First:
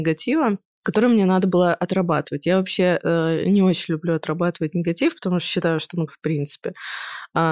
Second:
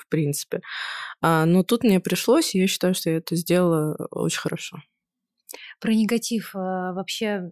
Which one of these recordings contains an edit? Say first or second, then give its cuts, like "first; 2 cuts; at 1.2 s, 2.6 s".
first; 1 cut; at 6.1 s